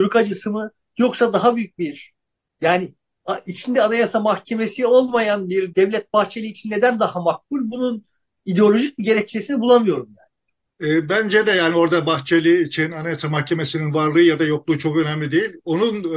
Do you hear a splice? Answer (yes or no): yes